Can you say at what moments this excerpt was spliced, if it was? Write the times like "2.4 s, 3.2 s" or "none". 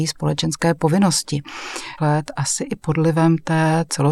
2.0 s